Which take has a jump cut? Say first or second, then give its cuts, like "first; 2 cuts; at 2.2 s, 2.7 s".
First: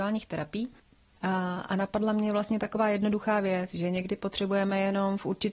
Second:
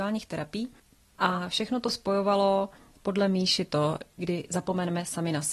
second; 2 cuts; at 1.1 s, 4.2 s